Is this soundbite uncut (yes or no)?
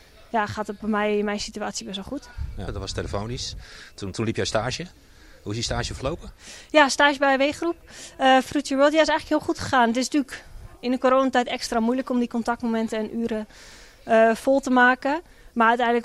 no